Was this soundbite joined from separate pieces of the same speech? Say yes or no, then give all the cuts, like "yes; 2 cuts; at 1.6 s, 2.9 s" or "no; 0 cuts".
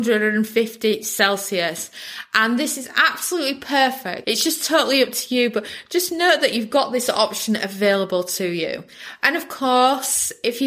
yes; 1 cut; at 4.2 s